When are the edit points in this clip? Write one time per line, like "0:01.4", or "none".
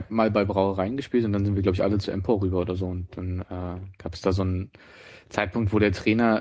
none